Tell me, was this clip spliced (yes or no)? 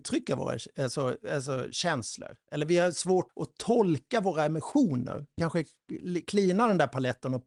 yes